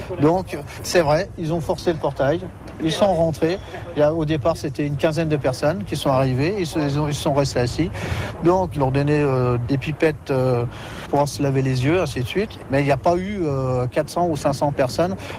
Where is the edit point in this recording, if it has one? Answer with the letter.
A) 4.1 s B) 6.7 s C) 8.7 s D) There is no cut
C